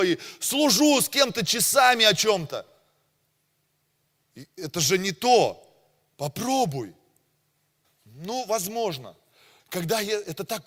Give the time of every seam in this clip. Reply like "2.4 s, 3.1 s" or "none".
4.2 s, 7.8 s, 9.6 s